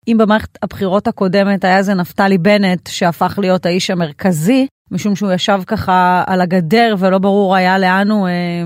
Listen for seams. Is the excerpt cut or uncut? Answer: uncut